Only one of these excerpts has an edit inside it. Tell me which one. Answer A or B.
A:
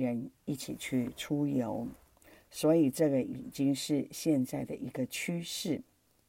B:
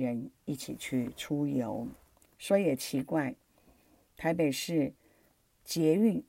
B